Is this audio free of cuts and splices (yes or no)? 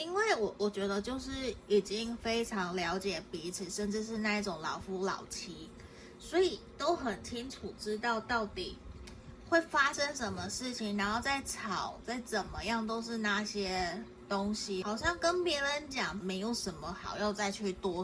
no